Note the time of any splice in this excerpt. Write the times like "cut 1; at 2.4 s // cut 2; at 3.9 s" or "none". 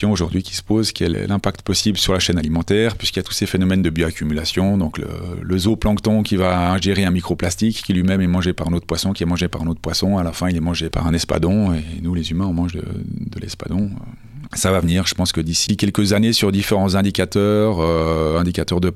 cut 1; at 14.5 s